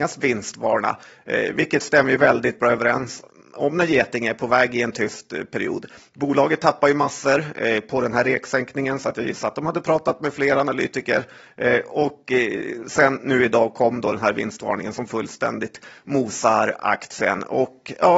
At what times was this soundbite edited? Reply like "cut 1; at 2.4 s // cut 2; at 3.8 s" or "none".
none